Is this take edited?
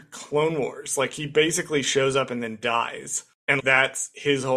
yes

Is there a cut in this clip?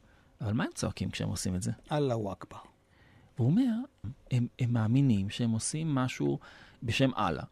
yes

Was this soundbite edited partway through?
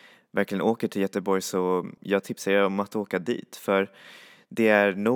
yes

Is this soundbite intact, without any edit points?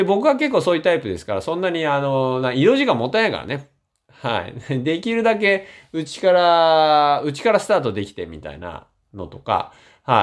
yes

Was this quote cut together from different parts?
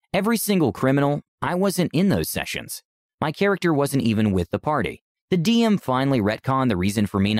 yes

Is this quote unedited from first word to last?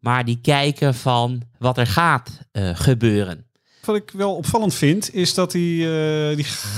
no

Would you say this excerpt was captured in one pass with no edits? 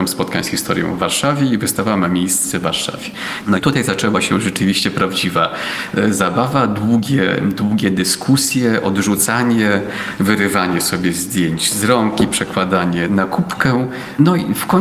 no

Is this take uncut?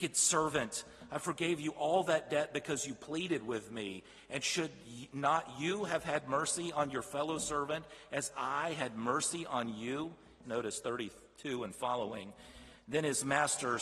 no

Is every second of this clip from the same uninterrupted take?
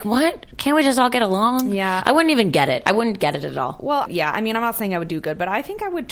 no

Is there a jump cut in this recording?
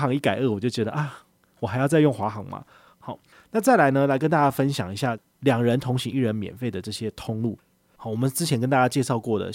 yes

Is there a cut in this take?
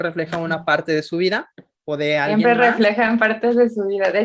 no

